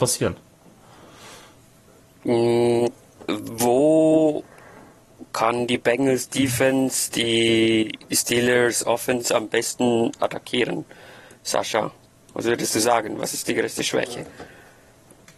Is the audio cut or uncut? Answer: uncut